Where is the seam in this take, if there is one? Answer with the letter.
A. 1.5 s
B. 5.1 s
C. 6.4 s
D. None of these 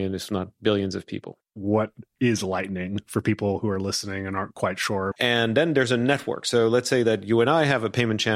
B